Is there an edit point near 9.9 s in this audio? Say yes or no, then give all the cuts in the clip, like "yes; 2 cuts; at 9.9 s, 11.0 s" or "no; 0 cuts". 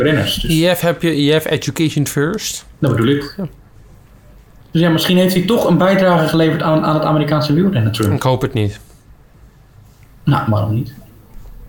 no; 1 cut; at 2.7 s